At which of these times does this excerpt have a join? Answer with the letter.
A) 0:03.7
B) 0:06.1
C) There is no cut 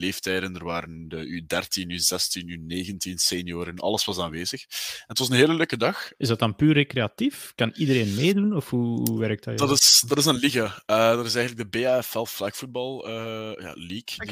B